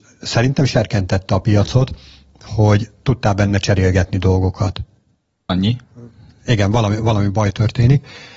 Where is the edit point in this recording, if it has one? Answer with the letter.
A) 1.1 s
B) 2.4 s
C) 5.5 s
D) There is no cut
C